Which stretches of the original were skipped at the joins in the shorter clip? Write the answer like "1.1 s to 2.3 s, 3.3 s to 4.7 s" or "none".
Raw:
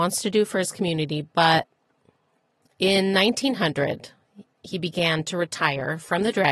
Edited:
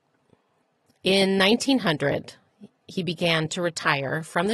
none

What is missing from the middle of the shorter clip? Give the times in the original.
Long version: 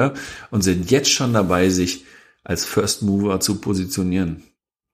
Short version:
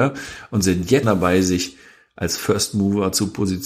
1.0 s to 1.3 s

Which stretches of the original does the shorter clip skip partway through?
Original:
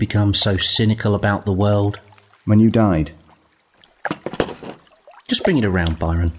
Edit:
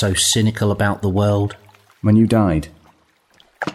none

